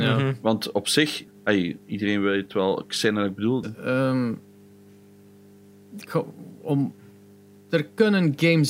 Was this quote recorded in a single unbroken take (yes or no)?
no